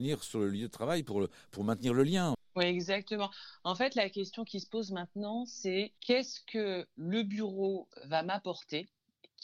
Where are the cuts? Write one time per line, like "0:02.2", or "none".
0:06.0